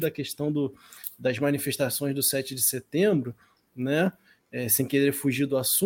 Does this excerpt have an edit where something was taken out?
no; 0 cuts

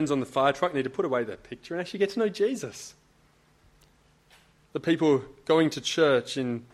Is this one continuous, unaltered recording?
yes; 0 cuts

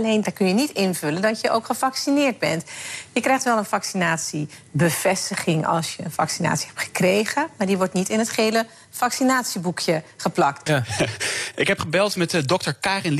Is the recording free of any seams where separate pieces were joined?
no; 1 cut; at 10.7 s

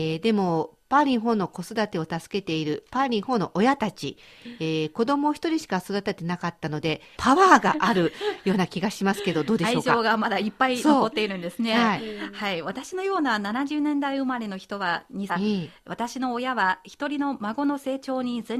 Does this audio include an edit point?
yes; 2 cuts; at 7.2 s, 15.3 s

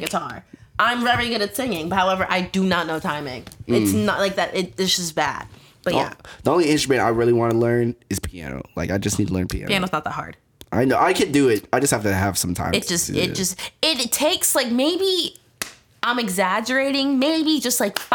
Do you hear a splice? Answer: no; 0 cuts

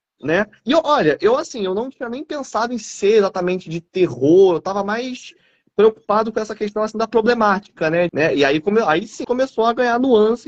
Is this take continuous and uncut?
no; 2 cuts; at 8.1 s, 9.2 s

